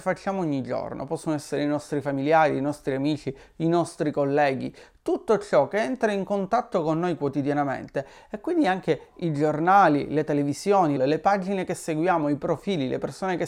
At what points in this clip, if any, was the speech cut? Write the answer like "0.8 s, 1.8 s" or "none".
11.0 s